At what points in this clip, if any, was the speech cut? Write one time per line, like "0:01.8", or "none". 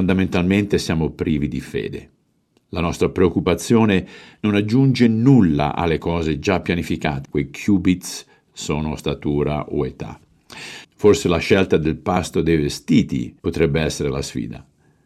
0:07.2
0:10.8
0:13.4